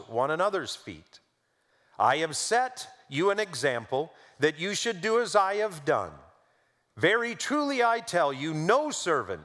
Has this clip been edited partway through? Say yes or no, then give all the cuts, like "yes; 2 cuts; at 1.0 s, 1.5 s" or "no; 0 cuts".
no; 0 cuts